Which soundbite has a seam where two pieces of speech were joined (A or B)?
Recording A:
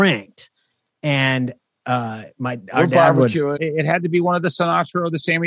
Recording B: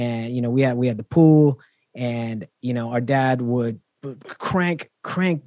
A